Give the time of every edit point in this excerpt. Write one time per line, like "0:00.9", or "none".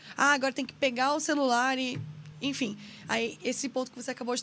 none